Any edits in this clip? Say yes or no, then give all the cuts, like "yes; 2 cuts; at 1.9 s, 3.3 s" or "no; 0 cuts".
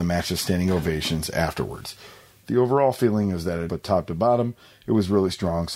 yes; 1 cut; at 3.7 s